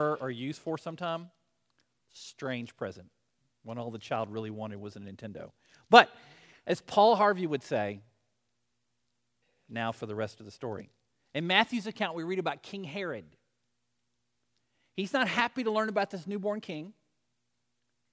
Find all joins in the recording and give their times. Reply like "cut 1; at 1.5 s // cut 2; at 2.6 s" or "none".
none